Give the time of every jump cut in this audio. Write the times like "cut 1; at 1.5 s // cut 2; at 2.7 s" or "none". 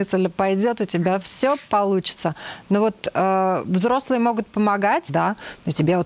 cut 1; at 5.1 s